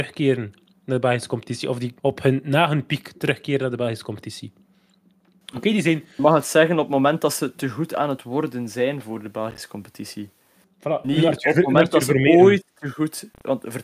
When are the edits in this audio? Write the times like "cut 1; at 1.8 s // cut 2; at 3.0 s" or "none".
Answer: cut 1; at 2.0 s